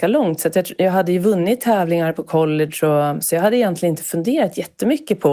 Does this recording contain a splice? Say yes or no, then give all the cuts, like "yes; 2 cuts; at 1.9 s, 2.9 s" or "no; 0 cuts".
no; 0 cuts